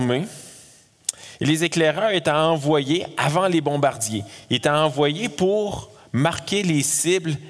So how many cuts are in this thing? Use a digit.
0